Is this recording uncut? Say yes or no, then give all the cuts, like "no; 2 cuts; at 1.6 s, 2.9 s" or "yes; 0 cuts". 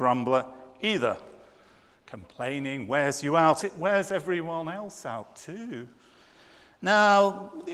no; 1 cut; at 3.6 s